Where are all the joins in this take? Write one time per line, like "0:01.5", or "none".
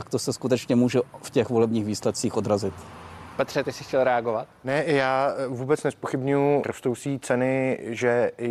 0:06.6

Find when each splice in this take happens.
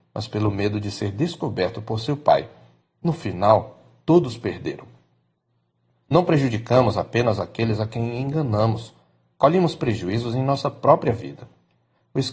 0:05.9

